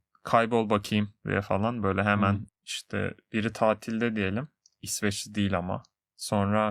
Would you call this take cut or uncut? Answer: cut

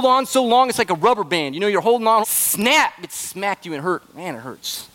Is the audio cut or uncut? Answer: cut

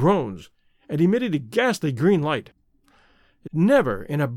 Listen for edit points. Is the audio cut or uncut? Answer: cut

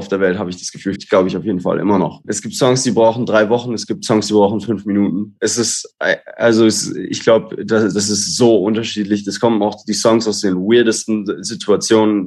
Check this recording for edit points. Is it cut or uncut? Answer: cut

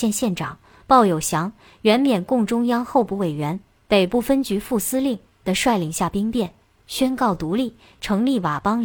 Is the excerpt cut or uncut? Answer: cut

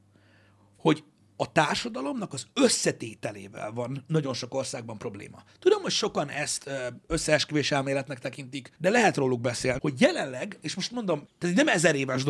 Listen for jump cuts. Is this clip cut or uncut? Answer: cut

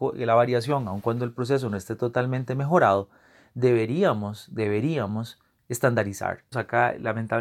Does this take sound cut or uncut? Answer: cut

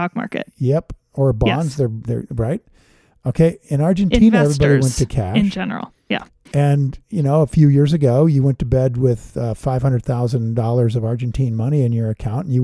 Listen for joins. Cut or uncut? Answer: uncut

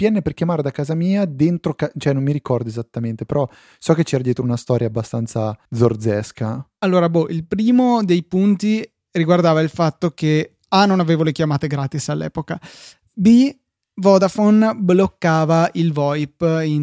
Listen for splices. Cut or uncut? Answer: cut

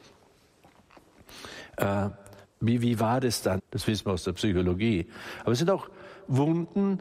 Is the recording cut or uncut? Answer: cut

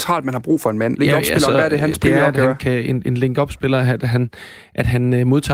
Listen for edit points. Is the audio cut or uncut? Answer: cut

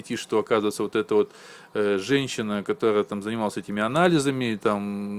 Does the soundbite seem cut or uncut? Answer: uncut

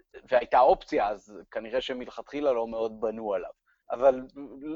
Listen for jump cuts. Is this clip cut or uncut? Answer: cut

